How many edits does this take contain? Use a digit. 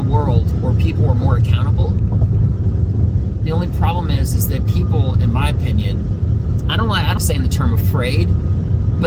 1